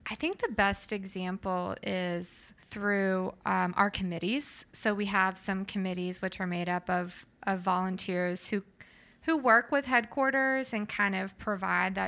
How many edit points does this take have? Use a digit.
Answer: 1